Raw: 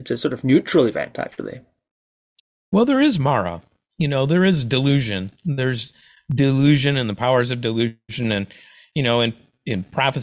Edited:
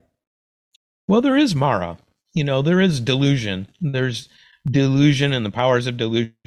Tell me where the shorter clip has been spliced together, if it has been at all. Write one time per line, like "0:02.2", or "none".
none